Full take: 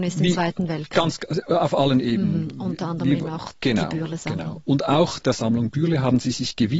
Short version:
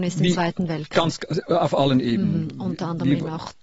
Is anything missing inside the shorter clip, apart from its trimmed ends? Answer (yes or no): no